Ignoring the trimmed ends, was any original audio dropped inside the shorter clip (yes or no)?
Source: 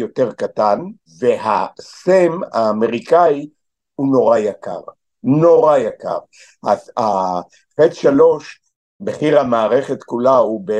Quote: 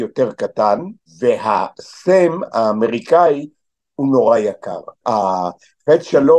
yes